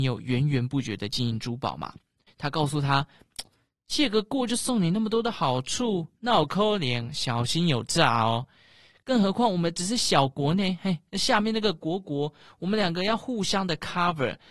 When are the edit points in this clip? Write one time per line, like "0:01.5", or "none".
0:02.3